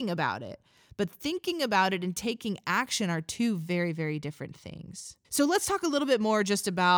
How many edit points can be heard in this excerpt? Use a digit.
1